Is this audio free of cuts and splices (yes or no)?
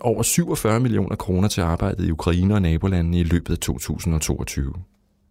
yes